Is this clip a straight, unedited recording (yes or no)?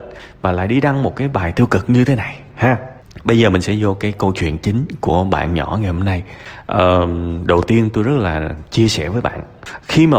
yes